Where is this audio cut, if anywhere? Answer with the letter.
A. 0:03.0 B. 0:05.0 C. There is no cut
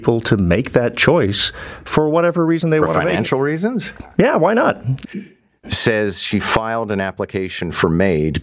B